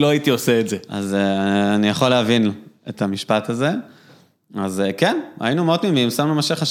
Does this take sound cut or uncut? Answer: uncut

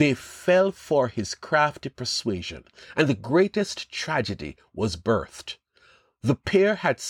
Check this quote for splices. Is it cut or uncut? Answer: uncut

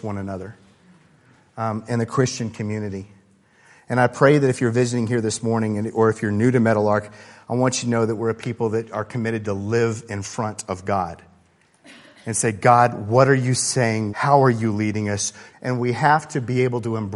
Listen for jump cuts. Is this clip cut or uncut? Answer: cut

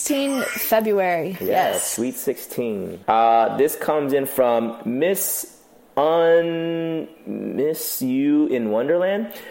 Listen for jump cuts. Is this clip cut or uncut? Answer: cut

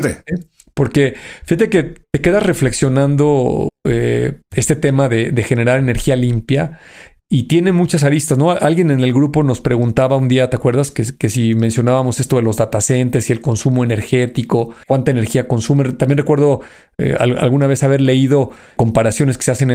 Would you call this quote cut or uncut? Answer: uncut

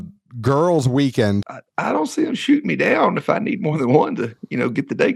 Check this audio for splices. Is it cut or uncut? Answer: cut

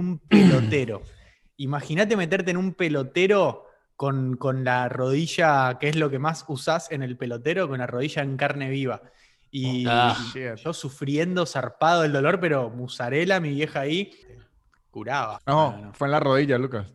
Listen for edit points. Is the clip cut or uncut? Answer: cut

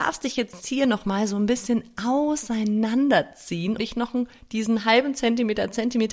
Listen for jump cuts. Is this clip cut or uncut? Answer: cut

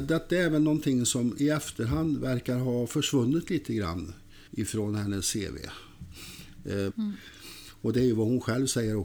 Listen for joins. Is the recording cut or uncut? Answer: cut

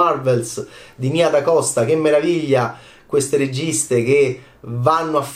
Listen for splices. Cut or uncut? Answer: uncut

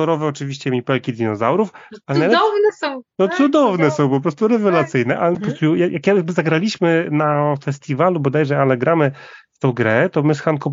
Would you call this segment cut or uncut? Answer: cut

